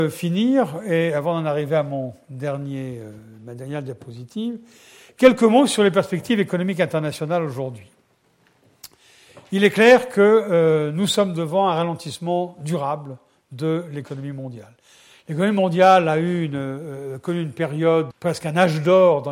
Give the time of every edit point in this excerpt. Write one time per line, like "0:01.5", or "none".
0:18.1